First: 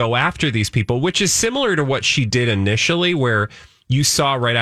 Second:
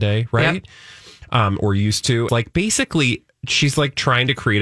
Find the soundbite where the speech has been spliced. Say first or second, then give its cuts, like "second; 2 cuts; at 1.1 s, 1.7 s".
second; 1 cut; at 2.3 s